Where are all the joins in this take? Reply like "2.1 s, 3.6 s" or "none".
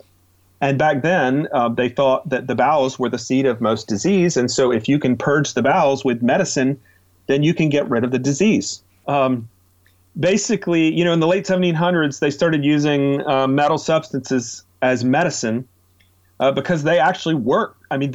9.0 s